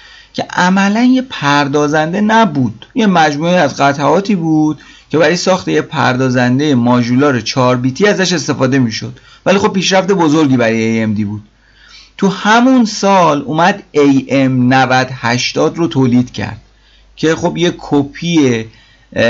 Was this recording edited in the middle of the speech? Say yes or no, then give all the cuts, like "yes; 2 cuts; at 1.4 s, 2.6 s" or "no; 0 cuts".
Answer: yes; 1 cut; at 2.9 s